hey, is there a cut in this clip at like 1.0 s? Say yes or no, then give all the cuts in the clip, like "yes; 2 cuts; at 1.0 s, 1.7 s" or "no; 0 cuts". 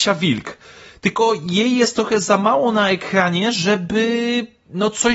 no; 0 cuts